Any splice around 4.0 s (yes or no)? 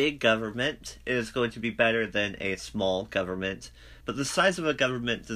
yes